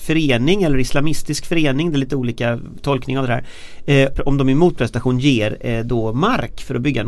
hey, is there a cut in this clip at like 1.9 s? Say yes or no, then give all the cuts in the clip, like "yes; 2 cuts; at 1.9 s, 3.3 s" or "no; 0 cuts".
no; 1 cut; at 4.1 s